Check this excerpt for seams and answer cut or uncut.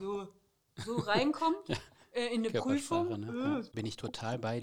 cut